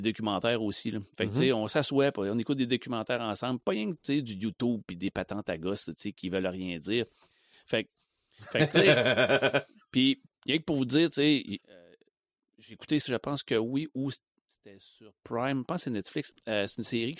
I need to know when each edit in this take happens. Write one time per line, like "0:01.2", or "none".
0:11.6
0:13.0